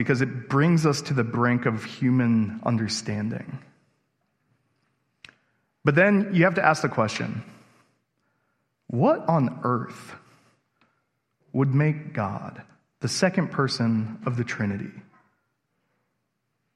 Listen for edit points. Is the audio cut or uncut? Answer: uncut